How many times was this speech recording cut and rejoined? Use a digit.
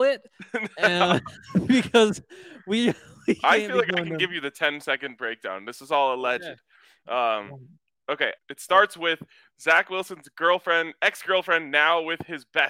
1